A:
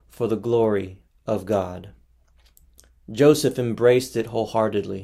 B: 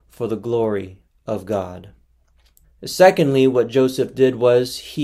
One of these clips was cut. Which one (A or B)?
B